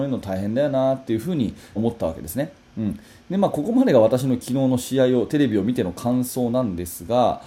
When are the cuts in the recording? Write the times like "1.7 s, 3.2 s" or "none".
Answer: 1.8 s